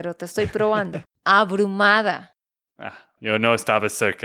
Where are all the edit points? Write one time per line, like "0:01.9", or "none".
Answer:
0:01.1
0:03.2